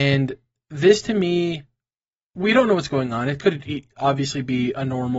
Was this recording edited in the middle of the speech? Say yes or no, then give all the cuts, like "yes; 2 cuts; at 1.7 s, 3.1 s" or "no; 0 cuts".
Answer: no; 0 cuts